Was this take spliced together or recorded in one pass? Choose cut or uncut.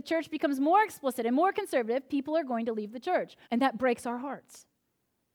cut